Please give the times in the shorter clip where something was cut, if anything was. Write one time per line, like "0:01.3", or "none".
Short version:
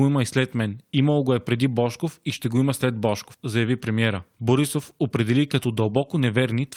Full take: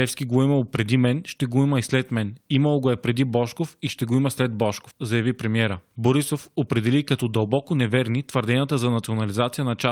none

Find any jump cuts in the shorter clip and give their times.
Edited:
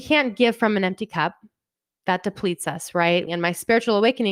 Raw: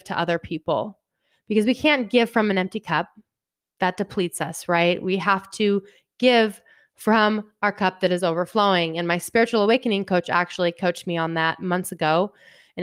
0:03.3

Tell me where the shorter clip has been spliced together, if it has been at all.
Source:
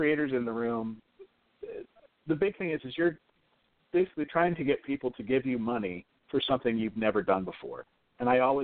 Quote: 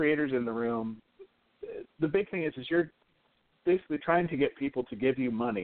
0:01.9

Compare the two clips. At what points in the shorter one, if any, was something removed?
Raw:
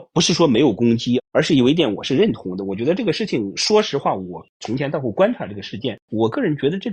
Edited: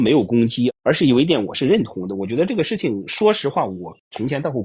none

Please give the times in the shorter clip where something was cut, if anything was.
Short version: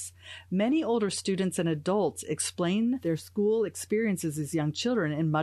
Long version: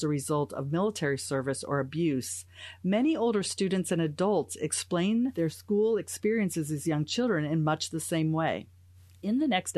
none

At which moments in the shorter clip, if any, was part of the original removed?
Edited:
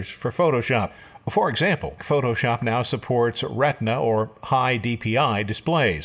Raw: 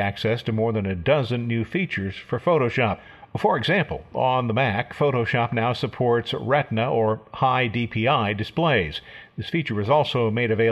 0:02.0

